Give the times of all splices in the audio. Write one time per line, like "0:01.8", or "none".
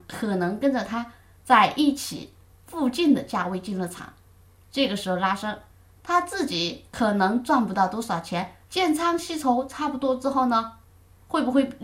0:08.7